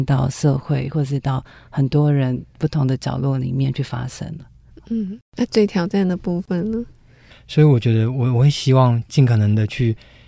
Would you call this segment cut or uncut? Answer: cut